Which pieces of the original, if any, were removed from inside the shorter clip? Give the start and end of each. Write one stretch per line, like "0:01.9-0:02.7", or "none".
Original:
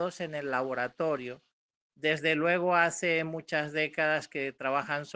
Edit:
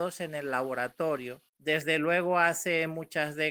0:01.5-0:01.9